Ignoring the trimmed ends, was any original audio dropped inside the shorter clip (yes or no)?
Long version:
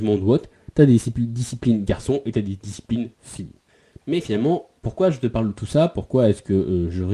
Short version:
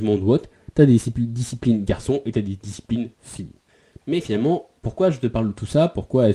no